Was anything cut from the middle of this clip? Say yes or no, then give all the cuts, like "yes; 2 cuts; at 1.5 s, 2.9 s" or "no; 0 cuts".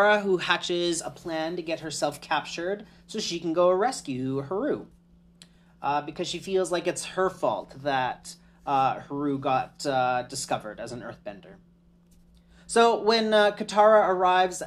no; 0 cuts